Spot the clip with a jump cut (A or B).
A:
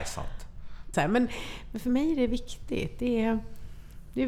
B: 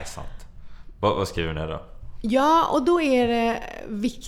A